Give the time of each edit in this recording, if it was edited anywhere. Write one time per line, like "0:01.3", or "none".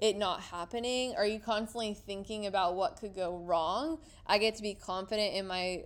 0:04.1